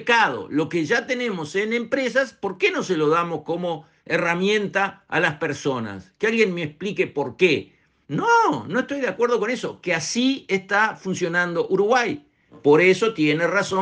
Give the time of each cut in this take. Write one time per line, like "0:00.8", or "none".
0:08.0